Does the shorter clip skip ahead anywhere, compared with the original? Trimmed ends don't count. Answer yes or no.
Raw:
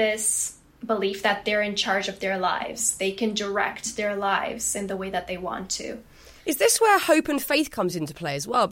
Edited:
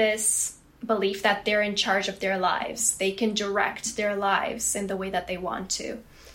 no